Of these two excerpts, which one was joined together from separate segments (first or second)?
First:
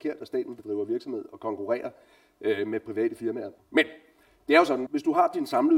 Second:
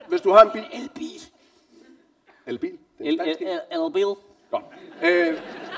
first